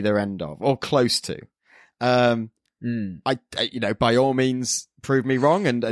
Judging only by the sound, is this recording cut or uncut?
uncut